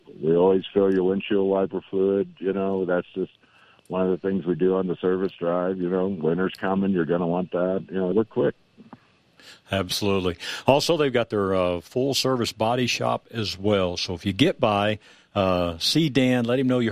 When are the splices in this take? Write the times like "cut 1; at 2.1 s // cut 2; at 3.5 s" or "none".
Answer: cut 1; at 8.1 s